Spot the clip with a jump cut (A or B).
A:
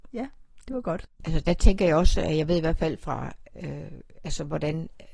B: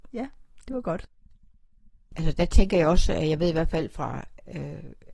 A